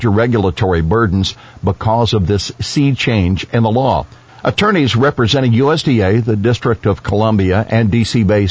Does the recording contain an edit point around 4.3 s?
yes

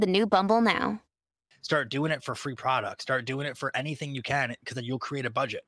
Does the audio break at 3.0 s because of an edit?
no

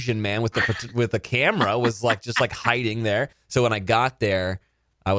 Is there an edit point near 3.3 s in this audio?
yes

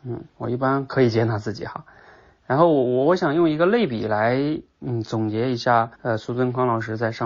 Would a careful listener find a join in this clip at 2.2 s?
no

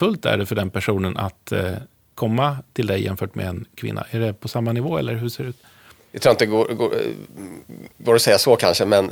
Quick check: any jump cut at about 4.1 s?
no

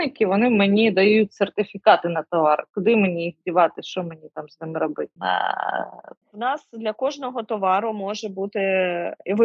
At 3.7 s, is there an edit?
no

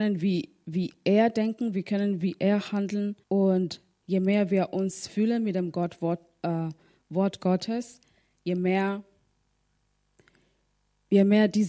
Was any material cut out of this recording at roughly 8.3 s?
no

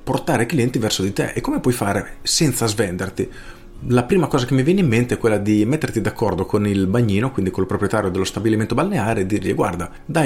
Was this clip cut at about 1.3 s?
no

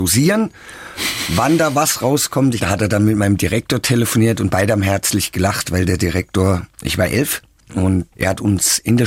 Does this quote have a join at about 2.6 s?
yes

